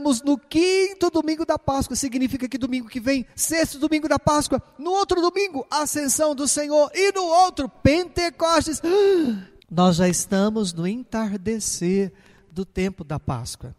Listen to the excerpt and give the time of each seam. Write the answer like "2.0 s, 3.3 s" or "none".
9.6 s